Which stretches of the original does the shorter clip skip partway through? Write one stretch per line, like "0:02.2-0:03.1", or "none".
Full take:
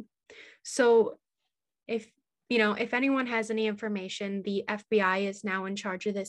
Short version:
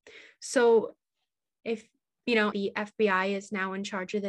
0:02.7-0:04.4